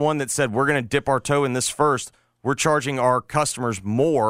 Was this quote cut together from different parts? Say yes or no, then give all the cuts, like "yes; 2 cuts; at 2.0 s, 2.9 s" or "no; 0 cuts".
no; 0 cuts